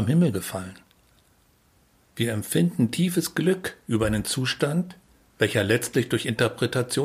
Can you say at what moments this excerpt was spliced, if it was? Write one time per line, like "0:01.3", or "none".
0:02.0